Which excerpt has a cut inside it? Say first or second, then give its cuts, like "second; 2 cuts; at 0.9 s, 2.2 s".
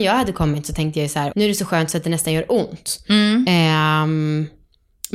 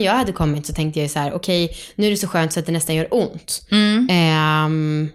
first; 1 cut; at 1.3 s